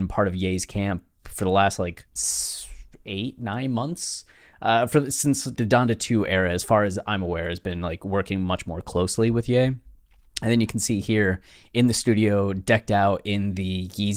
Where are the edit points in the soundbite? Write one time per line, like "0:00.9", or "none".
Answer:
0:02.1
0:05.6